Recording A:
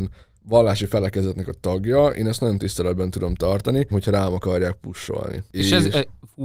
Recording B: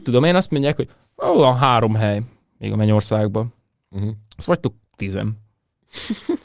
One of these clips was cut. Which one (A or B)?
A